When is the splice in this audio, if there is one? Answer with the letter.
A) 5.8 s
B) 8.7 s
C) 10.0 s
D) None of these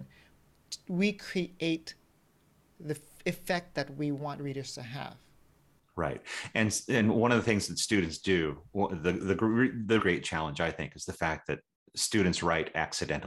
C